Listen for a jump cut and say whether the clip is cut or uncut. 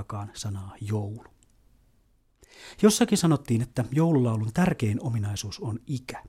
uncut